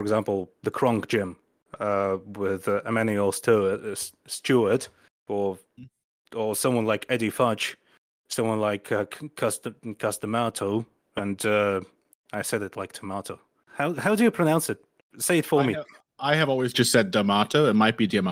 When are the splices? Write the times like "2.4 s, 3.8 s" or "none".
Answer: 5.3 s, 13.7 s